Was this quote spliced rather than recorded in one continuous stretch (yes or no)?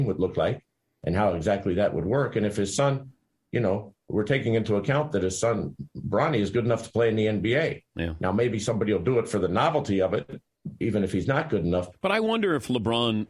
yes